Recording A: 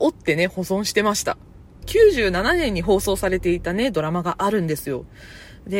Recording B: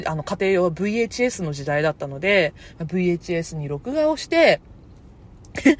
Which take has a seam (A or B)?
A